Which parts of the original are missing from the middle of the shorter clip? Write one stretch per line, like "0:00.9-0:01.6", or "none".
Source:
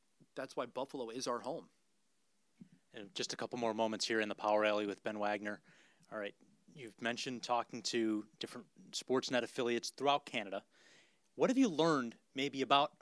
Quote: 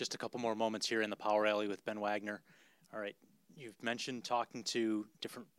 none